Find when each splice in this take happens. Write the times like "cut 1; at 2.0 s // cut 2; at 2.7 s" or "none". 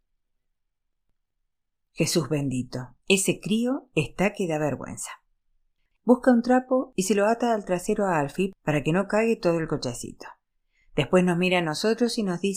none